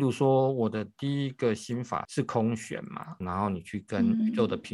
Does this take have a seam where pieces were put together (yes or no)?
yes